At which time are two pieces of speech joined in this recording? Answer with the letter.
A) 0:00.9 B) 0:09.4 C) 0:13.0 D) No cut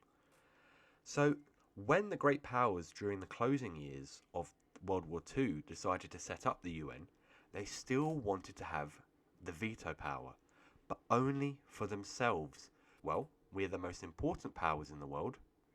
C